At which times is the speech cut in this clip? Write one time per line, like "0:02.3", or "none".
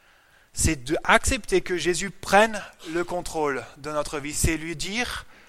none